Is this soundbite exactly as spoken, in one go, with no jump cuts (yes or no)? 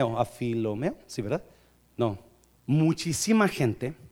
no